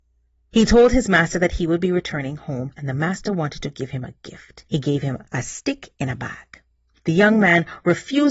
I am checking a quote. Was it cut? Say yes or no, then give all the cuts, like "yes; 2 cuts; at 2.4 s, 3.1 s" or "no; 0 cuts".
no; 0 cuts